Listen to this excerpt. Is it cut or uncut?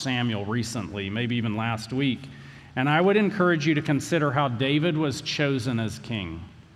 uncut